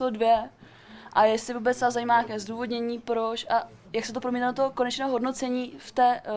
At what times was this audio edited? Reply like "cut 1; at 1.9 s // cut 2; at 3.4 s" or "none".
none